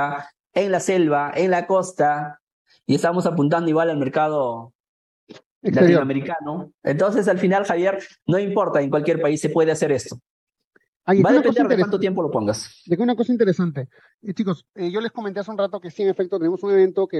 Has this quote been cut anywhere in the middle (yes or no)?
no